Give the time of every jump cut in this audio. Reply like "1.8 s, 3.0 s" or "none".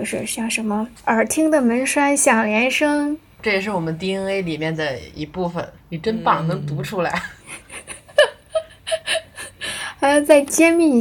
1.0 s